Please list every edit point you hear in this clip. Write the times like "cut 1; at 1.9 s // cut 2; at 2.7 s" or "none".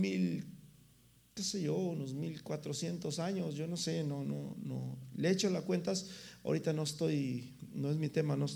none